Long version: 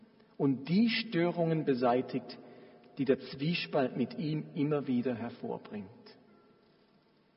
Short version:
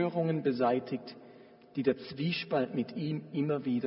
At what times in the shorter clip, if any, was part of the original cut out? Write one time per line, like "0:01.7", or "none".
none